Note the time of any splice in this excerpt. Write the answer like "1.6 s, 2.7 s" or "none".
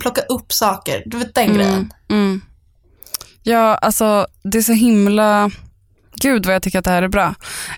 none